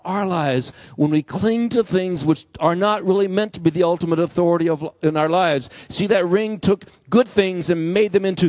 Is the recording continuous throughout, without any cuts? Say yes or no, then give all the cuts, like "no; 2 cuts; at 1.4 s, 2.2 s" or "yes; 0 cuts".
yes; 0 cuts